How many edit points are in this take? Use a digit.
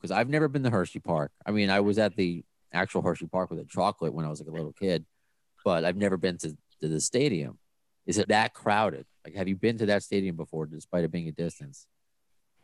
1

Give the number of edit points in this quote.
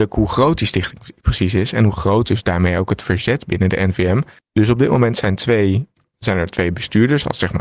1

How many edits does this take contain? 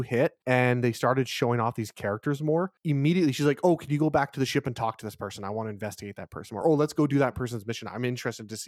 0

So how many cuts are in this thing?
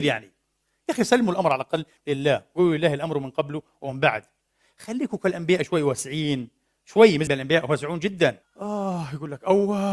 2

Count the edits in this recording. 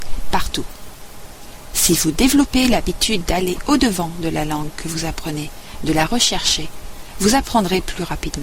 0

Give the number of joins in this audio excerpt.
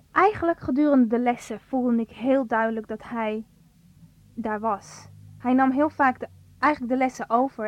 0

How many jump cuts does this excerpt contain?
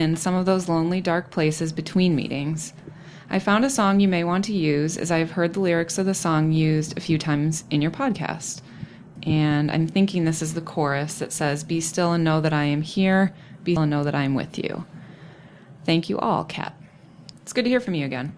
3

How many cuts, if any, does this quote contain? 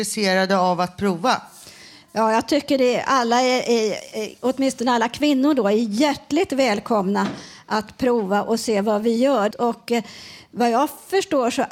1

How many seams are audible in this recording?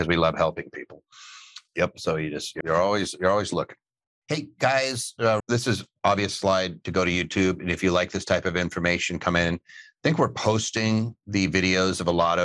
2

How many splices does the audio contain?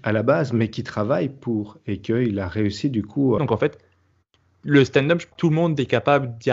2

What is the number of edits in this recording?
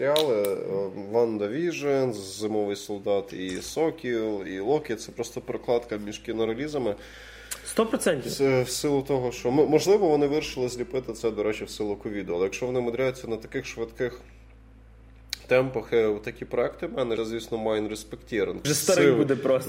2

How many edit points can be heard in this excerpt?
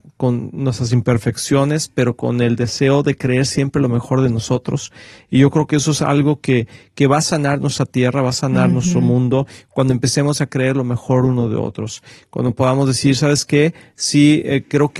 0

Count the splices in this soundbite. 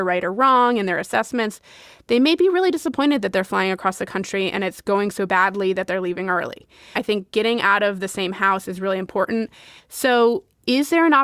2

